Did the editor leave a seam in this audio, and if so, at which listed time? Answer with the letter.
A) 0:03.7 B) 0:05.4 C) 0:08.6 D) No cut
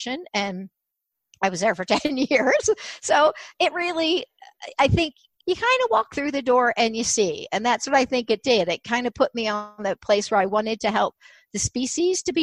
B